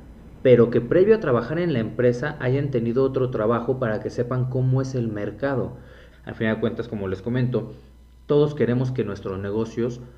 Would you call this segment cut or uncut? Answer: cut